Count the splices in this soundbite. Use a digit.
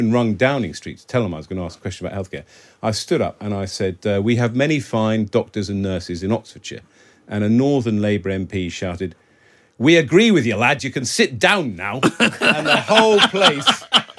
0